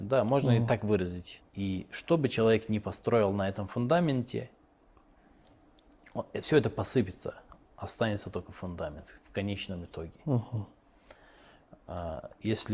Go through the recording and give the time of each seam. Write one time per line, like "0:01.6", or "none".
0:01.4